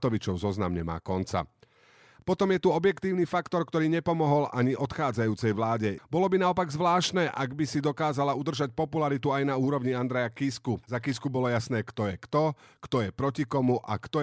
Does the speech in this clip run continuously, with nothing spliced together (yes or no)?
no